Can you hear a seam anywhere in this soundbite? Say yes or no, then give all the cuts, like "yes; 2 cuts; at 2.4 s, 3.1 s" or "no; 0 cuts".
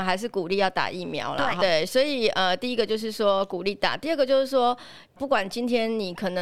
yes; 2 cuts; at 1.6 s, 5.2 s